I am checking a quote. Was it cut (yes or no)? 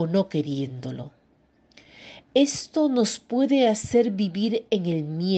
no